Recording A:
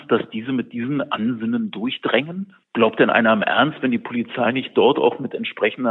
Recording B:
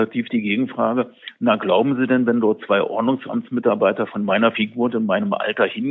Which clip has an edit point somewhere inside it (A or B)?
A